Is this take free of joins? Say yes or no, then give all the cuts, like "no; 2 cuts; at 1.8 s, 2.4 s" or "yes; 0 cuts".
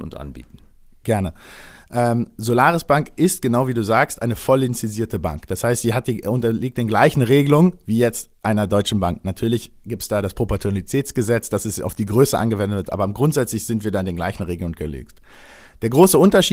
yes; 0 cuts